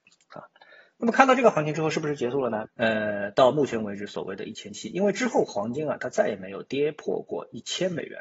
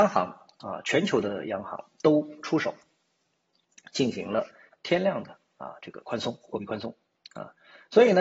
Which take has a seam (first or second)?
first